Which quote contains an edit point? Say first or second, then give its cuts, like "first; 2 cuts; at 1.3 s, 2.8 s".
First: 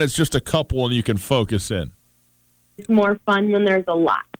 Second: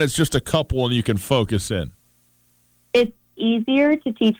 first; 1 cut; at 2.8 s